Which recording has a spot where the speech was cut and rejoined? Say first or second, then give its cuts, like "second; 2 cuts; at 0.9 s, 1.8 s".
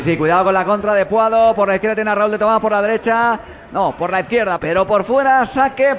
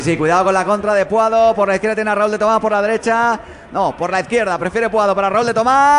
first; 1 cut; at 4.6 s